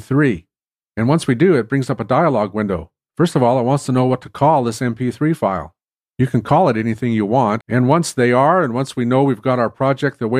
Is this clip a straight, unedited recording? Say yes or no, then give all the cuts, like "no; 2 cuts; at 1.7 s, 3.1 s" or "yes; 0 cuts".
no; 1 cut; at 7.6 s